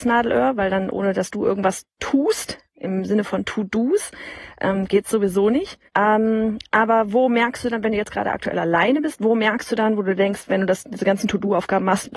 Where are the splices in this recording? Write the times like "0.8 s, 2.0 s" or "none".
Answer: 5.9 s